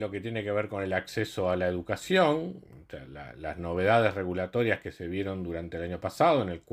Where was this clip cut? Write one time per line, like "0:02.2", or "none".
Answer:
0:03.1